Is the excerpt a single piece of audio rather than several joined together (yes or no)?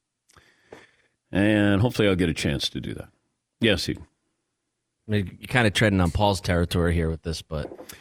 yes